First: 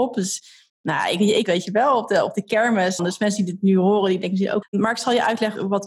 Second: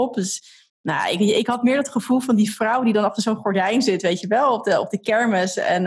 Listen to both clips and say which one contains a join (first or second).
first